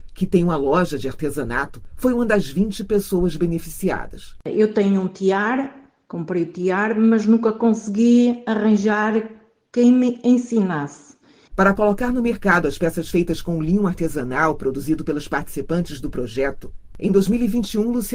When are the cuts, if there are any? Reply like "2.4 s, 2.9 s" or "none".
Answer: 11.5 s